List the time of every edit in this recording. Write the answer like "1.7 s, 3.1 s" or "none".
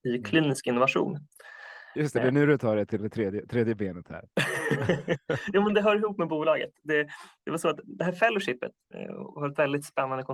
none